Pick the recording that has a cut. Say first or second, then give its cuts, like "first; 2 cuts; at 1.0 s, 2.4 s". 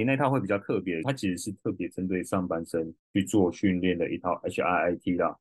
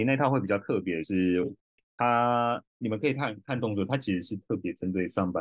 first; 2 cuts; at 1.0 s, 3.0 s